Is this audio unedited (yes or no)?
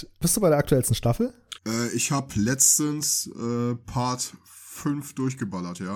no